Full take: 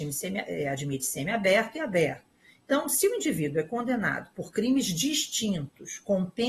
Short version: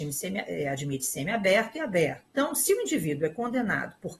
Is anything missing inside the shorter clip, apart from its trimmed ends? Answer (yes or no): yes